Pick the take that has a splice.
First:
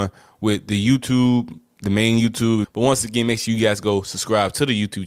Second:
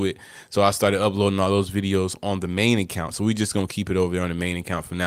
first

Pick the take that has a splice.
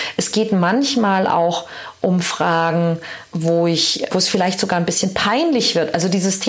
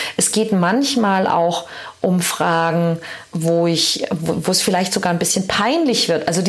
first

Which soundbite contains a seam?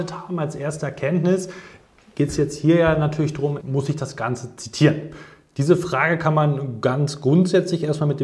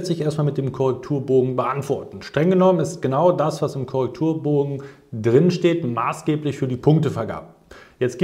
first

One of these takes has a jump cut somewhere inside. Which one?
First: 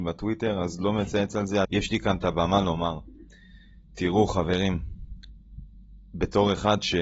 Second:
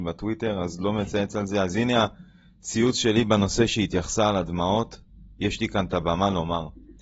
first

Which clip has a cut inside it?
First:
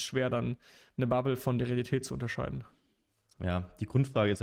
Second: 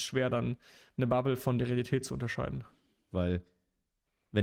second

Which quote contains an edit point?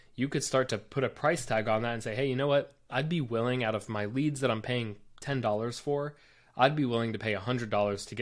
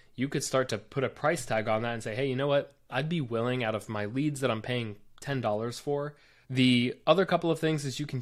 second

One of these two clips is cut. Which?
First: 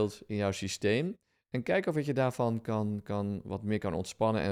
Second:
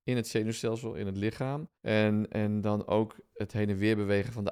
second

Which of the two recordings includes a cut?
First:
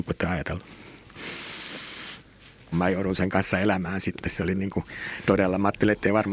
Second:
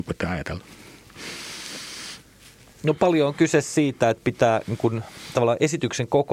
first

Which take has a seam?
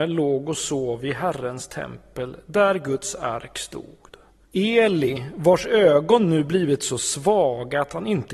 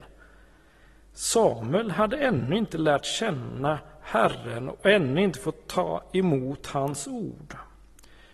first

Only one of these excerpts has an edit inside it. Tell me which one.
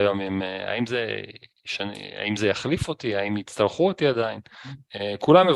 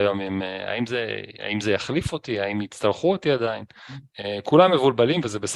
second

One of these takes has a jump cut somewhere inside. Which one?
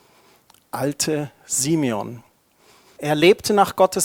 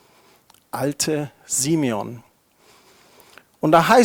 first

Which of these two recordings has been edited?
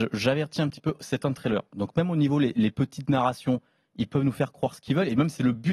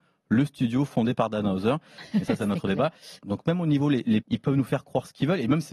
second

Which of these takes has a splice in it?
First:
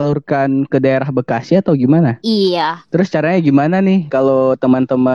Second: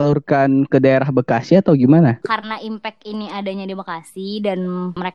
first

